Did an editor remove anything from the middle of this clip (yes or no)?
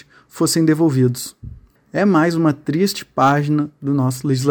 yes